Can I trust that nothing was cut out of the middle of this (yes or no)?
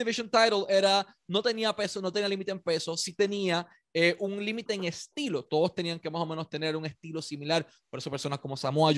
yes